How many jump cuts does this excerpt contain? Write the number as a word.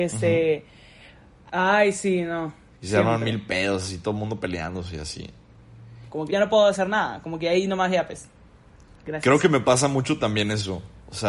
two